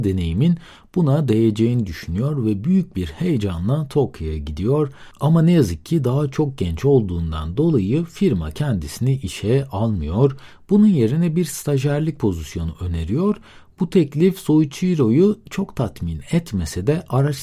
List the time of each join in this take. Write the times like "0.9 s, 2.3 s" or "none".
none